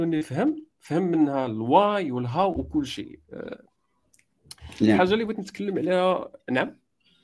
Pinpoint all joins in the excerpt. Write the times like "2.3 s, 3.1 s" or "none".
none